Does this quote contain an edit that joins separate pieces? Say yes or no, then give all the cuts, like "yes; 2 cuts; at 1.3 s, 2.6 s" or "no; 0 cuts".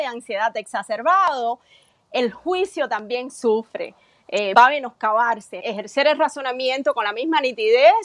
yes; 2 cuts; at 4.5 s, 5.6 s